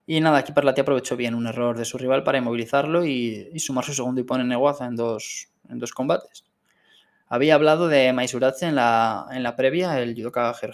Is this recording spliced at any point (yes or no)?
no